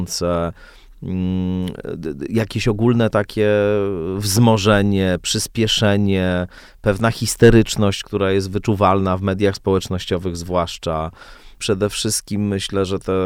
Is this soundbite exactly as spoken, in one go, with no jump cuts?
no; 1 cut; at 11.6 s

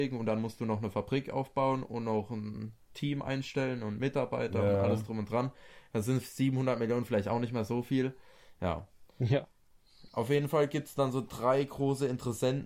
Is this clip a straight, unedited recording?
yes; 0 cuts

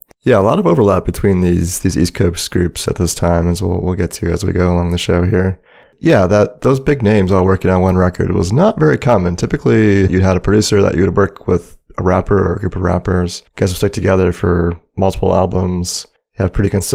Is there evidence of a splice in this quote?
yes; 1 cut; at 10.1 s

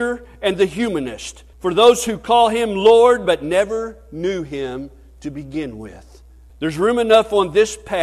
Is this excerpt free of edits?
no; 3 cuts; at 1.5 s, 3.2 s, 6.5 s

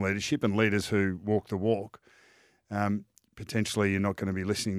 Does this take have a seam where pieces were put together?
no; 0 cuts

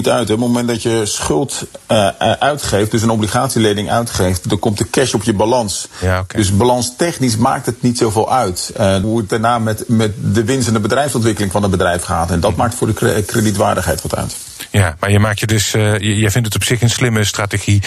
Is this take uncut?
no; 1 cut; at 9.0 s

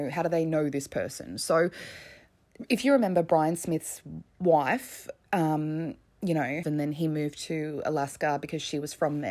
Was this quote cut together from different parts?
yes; 1 cut; at 6.6 s

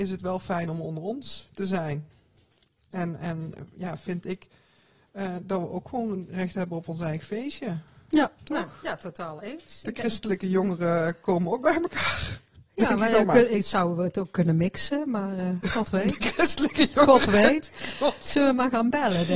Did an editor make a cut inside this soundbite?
no; 0 cuts

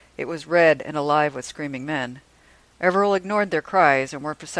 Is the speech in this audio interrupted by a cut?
no; 0 cuts

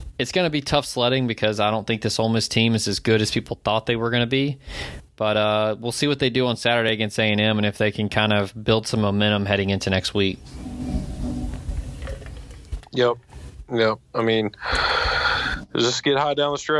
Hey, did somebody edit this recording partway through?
no; 0 cuts

